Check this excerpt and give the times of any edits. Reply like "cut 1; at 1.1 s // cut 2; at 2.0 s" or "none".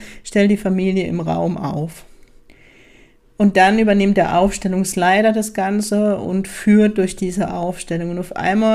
none